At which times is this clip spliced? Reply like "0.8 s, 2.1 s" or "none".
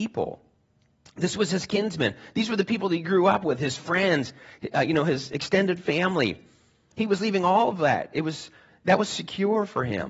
6.9 s